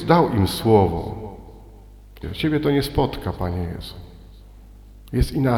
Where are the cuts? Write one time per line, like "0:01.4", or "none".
0:02.2